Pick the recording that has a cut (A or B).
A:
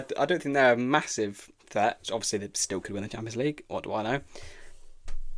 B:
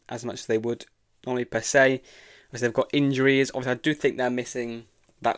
A